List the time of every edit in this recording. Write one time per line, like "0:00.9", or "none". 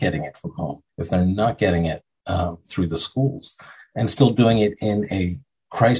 none